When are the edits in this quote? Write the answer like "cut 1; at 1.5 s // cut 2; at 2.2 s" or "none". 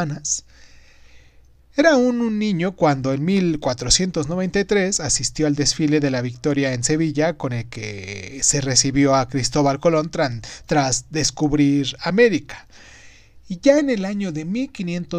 cut 1; at 1.6 s